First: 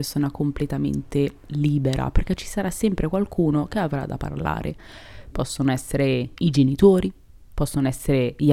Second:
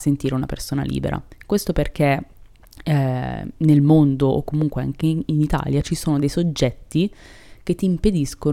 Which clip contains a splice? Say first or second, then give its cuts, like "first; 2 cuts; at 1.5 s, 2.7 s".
first; 1 cut; at 5.3 s